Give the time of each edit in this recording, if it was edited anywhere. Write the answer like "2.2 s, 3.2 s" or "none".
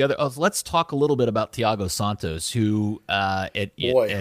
none